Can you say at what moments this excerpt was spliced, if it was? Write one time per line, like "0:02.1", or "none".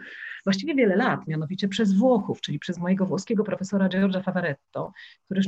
0:01.3